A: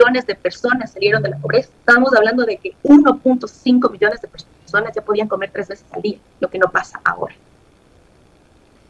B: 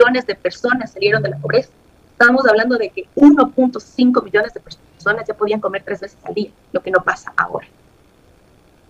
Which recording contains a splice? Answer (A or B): A